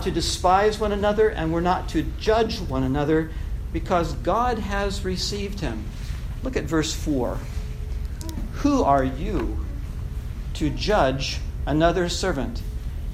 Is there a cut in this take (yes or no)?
no